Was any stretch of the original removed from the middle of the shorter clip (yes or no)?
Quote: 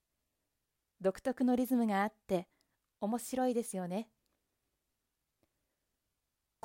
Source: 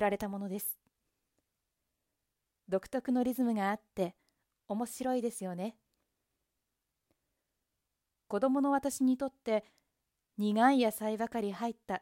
no